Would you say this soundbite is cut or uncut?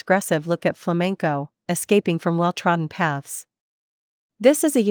uncut